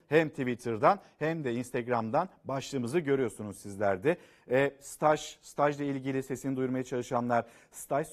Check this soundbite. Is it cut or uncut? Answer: uncut